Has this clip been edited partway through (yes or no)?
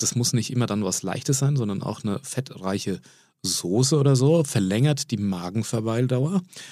no